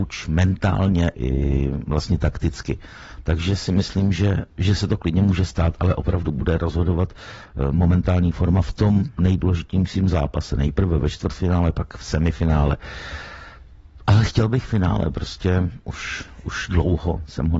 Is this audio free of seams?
no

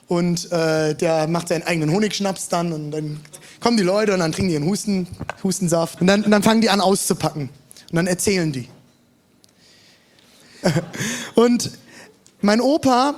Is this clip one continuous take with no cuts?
no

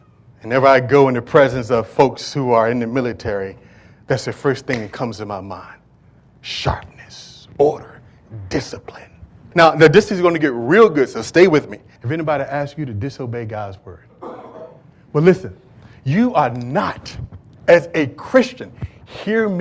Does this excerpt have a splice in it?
yes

